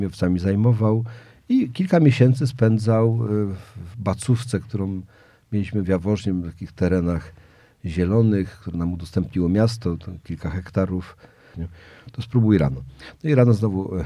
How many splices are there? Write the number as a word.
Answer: one